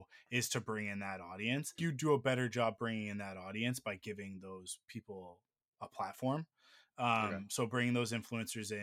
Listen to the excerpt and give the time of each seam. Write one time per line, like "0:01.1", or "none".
0:01.8